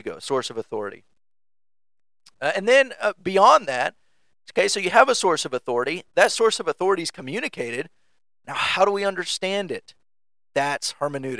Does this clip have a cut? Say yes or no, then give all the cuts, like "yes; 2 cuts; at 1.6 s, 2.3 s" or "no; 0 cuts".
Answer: no; 0 cuts